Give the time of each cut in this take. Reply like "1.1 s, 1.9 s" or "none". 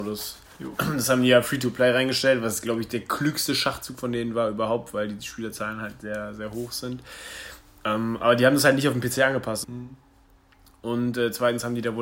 9.6 s